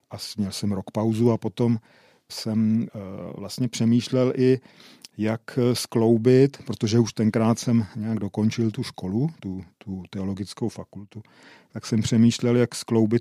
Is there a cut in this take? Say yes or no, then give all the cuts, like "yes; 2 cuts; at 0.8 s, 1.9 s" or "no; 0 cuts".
no; 0 cuts